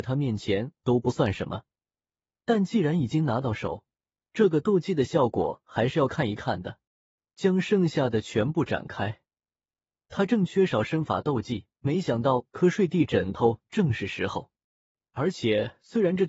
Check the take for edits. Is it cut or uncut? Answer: cut